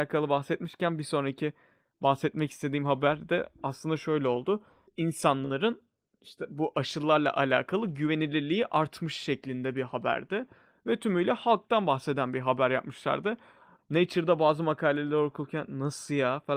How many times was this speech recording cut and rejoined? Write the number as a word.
two